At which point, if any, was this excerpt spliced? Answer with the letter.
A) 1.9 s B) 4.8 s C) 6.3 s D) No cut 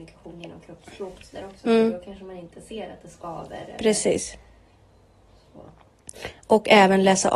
D